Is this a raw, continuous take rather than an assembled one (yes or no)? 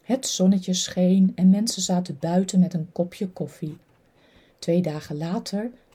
yes